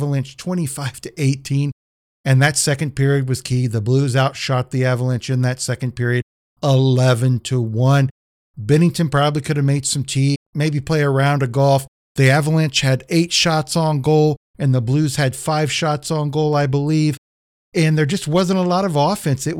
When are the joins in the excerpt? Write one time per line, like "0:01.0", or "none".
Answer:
0:10.3
0:12.0